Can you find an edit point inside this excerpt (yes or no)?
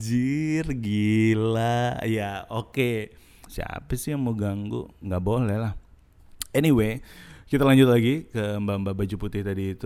yes